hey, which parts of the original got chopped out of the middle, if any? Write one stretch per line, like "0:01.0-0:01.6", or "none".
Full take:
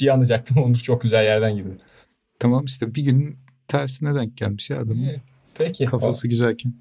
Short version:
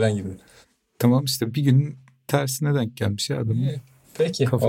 none

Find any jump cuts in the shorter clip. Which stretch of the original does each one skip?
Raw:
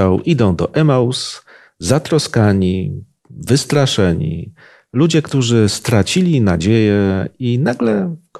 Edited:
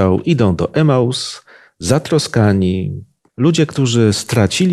0:03.3-0:04.8

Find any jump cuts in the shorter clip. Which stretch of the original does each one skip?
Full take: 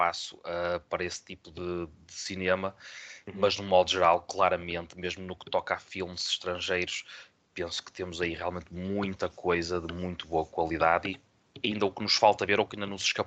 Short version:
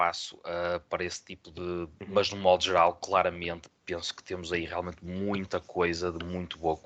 0:02.0-0:03.3
0:04.9-0:07.4

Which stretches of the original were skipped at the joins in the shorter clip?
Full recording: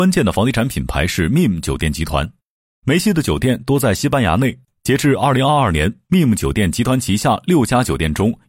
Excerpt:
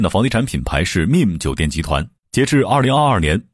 0:02.5-0:04.7

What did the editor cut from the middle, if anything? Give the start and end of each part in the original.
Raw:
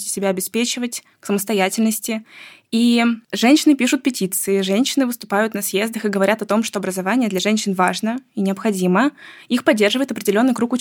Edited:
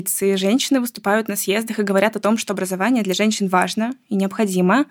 none

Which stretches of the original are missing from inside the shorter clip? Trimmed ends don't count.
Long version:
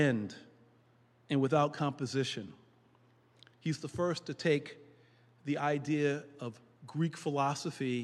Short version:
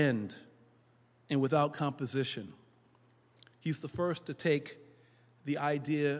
none

